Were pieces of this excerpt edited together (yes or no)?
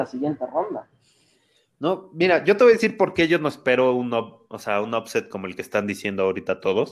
no